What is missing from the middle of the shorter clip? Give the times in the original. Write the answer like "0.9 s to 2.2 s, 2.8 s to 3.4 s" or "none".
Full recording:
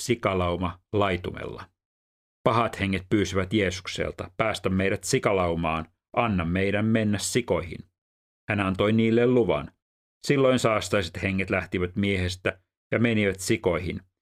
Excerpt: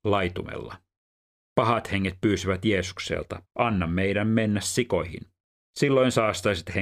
4.3 s to 6.0 s, 8.2 s to 10.1 s